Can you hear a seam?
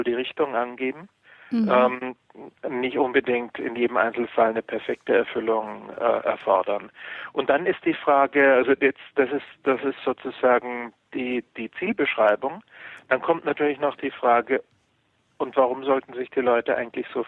no; 0 cuts

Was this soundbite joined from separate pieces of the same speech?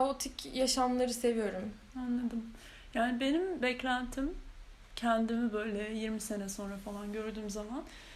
no; 0 cuts

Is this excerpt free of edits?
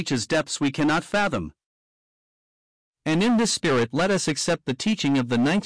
yes; 0 cuts

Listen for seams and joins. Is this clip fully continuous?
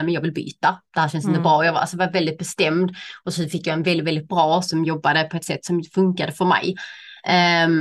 yes; 0 cuts

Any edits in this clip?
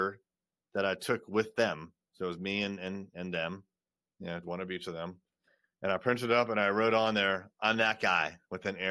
yes; 1 cut; at 4.4 s

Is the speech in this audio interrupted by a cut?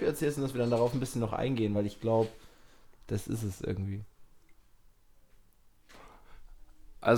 no; 0 cuts

